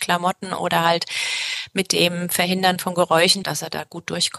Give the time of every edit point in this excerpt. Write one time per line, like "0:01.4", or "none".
0:03.4